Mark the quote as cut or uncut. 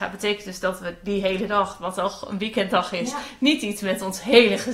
uncut